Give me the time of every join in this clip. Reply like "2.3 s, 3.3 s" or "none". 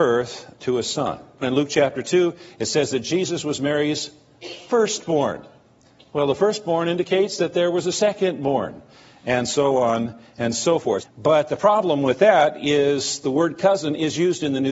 1.4 s, 11.0 s